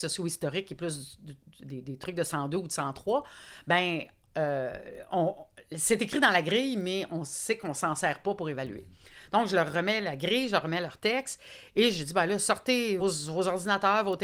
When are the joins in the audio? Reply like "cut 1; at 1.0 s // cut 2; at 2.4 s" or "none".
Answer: cut 1; at 13.0 s